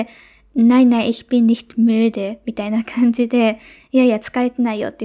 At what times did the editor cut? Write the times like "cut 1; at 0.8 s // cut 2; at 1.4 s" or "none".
none